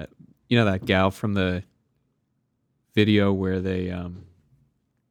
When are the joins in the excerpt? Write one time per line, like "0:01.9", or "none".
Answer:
none